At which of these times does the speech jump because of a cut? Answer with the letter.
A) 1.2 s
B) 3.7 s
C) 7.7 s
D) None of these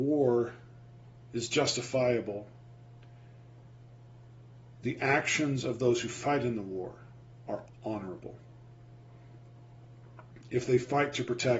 C